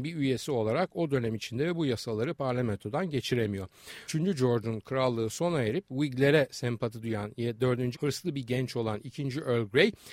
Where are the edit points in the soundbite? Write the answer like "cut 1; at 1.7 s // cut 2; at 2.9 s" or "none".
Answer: cut 1; at 4.1 s // cut 2; at 7.9 s